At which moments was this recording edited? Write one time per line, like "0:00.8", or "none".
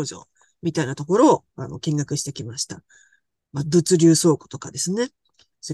none